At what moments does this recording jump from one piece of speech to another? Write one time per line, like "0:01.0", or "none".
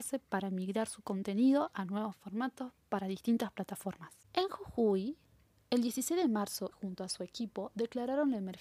0:04.2
0:06.7